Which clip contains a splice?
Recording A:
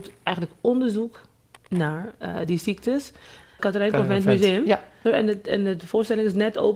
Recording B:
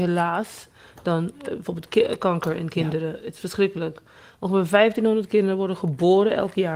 A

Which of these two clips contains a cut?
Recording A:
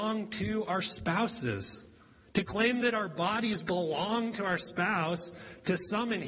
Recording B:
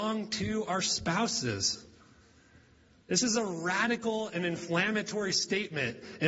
A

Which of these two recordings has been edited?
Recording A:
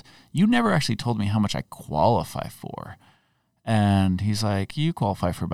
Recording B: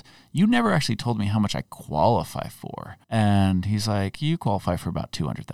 B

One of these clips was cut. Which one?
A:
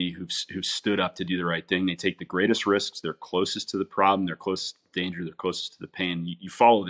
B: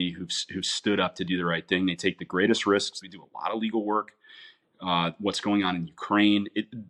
B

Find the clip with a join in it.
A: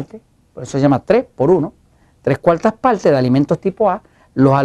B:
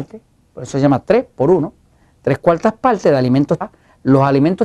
B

